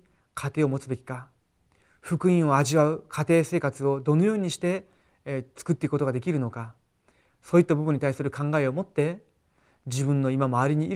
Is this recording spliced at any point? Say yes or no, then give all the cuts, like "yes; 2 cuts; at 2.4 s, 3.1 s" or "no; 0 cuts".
no; 0 cuts